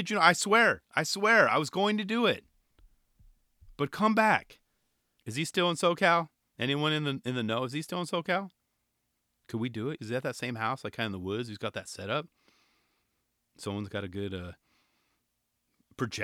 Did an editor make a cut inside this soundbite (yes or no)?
yes